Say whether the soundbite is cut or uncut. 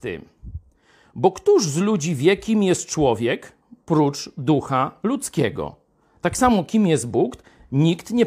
uncut